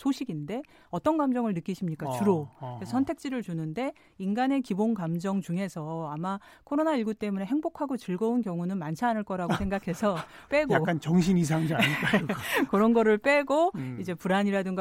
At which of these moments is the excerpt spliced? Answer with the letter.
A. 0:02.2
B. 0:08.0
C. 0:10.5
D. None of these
C